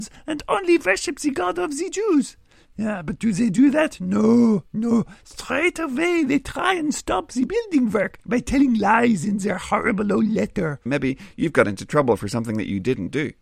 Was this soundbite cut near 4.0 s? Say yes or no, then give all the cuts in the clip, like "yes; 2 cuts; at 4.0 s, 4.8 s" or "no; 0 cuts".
no; 1 cut; at 10.9 s